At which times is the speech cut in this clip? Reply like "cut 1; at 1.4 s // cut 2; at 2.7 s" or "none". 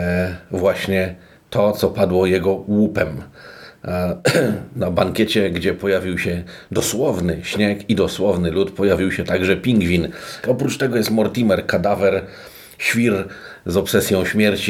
cut 1; at 10.4 s